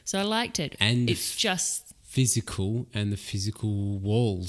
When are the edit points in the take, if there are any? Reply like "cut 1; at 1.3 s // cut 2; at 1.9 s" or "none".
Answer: none